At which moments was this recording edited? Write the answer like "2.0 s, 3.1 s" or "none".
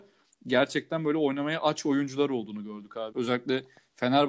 3.1 s